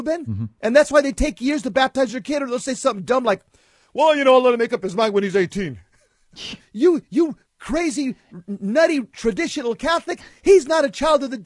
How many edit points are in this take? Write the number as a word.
one